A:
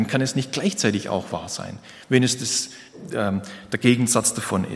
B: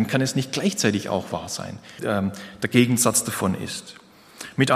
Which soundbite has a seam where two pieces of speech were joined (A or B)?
B